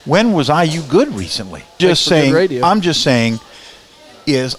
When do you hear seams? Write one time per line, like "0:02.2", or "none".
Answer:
0:01.8